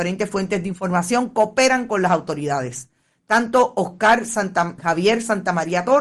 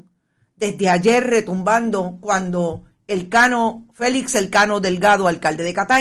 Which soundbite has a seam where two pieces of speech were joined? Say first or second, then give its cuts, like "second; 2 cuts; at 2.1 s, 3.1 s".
first; 1 cut; at 4.8 s